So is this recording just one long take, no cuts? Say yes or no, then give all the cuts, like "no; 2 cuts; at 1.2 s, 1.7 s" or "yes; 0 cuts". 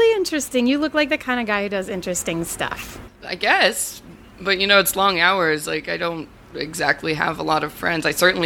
no; 1 cut; at 3.1 s